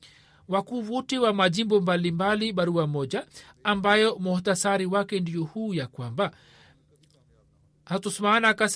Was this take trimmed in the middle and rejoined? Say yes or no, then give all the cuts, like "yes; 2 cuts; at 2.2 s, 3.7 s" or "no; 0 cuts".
no; 0 cuts